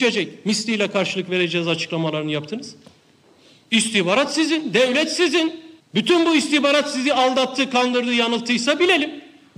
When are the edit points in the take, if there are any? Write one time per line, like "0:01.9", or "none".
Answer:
0:05.8